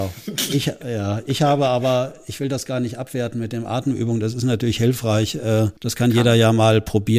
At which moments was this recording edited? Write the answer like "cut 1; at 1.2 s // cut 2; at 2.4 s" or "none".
cut 1; at 5.8 s